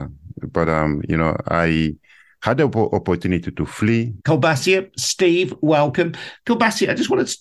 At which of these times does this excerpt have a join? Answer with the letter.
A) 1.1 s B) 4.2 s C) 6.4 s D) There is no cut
B